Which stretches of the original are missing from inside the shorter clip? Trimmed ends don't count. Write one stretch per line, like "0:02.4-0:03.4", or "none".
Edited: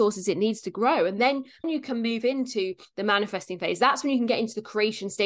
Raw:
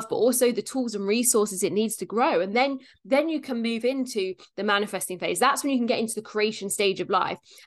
0:03.0-0:03.2